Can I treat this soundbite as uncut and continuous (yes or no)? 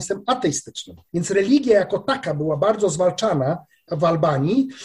no